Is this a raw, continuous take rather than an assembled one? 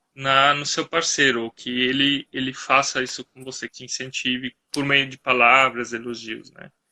no; 1 cut; at 3.7 s

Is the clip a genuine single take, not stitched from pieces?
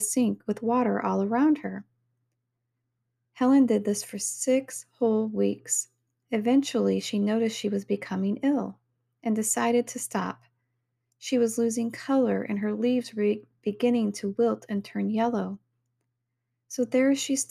yes; 0 cuts

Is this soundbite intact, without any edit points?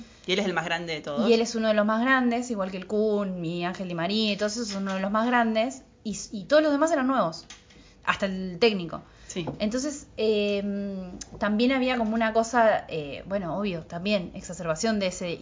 yes; 0 cuts

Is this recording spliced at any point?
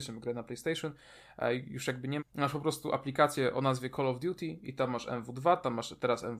yes; 1 cut; at 2.2 s

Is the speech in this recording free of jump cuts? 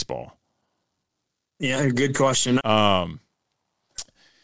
no; 1 cut; at 2.6 s

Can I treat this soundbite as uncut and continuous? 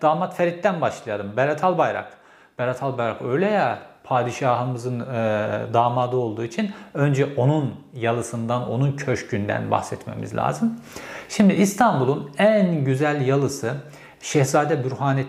yes; 0 cuts

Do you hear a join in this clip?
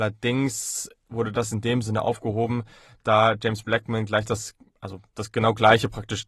no; 0 cuts

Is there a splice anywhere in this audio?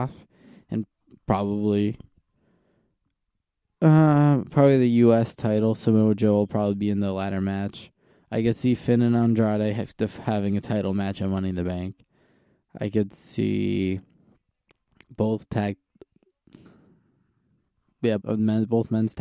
yes; 1 cut; at 18.2 s

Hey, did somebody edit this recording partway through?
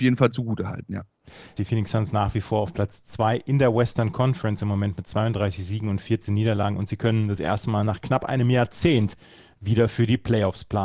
yes; 1 cut; at 1.6 s

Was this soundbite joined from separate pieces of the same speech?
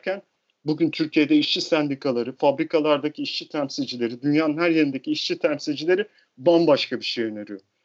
no; 0 cuts

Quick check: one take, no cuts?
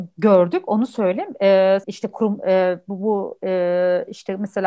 no; 1 cut; at 1.8 s

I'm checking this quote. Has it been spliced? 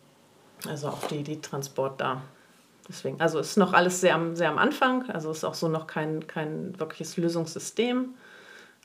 no; 0 cuts

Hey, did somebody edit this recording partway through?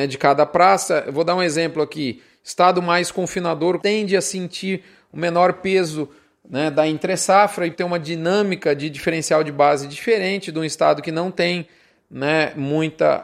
yes; 2 cuts; at 3.8 s, 7.7 s

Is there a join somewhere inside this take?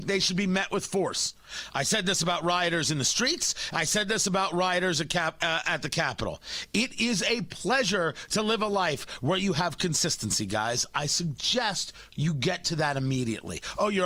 no; 0 cuts

